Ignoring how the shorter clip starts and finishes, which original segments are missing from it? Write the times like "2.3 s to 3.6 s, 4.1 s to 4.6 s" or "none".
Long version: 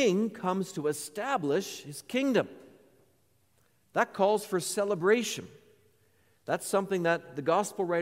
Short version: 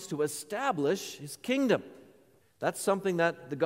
3.1 s to 6.3 s